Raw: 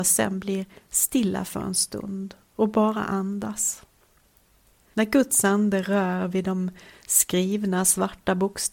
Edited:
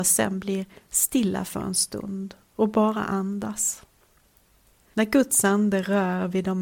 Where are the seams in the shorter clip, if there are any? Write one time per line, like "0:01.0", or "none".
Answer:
none